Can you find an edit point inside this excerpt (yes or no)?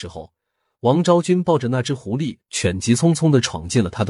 no